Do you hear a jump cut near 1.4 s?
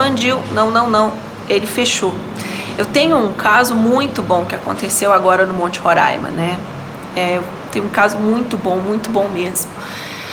no; 0 cuts

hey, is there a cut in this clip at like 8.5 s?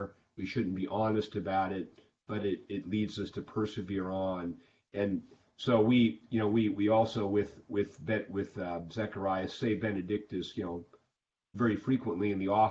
no; 1 cut; at 3.3 s

